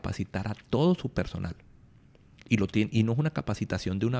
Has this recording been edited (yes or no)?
no